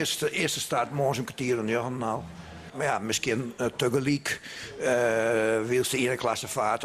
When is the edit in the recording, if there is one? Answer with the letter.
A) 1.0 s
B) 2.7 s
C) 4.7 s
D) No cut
B